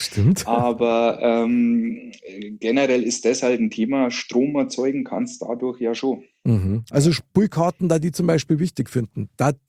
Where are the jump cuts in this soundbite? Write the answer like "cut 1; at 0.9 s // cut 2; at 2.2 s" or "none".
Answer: cut 1; at 6.9 s